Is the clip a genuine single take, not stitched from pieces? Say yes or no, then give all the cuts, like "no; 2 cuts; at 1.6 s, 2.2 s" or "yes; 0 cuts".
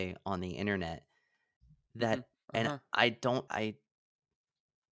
no; 2 cuts; at 2.3 s, 3.5 s